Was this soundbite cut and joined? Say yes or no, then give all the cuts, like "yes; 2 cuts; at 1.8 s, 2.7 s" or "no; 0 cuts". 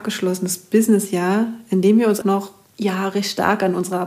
yes; 1 cut; at 2.2 s